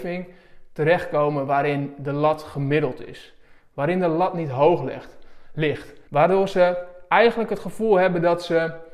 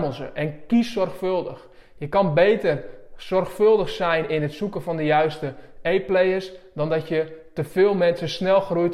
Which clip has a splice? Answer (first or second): first